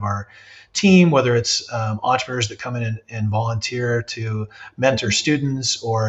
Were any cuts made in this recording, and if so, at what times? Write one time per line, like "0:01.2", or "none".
none